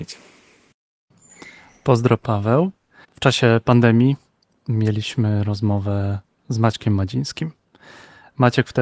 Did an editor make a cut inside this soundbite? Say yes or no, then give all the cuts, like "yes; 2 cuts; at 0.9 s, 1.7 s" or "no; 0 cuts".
yes; 1 cut; at 3.0 s